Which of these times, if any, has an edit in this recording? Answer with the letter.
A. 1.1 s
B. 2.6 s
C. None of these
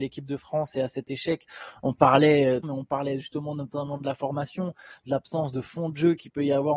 B